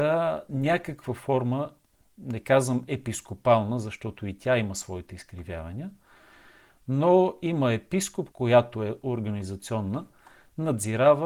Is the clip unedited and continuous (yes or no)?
no